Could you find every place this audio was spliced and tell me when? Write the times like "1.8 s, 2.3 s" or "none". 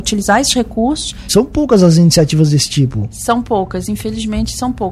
1.3 s